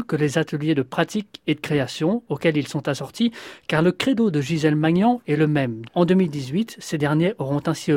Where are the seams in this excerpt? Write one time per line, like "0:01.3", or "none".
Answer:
0:05.8